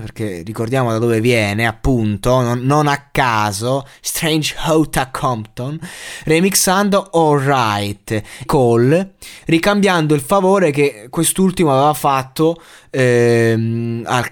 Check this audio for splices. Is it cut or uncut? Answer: cut